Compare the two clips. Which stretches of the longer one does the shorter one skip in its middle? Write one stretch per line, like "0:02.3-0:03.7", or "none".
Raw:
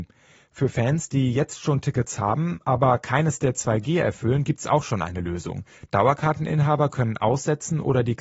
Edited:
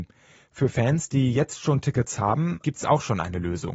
0:02.6-0:04.5